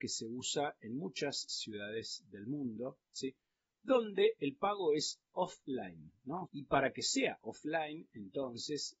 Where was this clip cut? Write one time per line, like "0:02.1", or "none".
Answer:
0:06.4